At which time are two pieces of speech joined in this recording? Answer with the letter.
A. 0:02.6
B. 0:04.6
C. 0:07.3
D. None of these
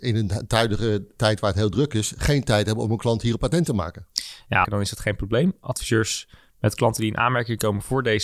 B